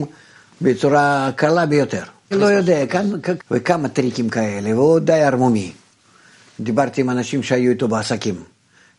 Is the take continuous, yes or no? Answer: no